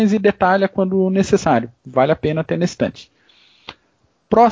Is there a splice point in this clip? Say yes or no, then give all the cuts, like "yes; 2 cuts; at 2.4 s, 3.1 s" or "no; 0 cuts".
no; 0 cuts